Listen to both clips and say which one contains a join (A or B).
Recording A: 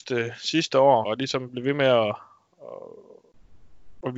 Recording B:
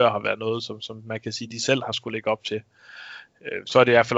A